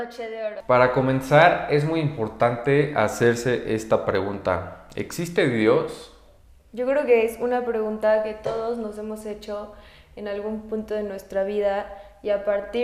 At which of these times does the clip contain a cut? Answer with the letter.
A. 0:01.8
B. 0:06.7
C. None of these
B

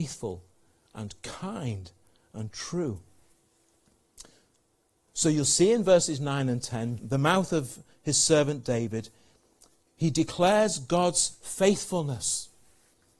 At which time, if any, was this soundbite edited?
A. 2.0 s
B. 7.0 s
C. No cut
B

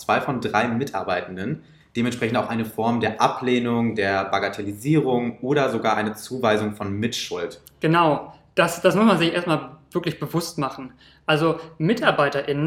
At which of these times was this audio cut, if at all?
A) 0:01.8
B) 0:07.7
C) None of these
A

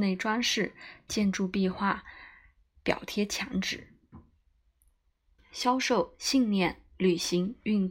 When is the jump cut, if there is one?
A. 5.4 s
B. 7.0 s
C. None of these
A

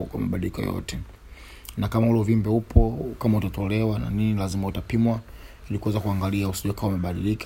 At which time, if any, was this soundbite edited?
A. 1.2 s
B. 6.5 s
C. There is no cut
C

